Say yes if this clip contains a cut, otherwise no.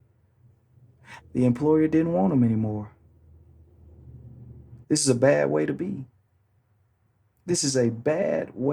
yes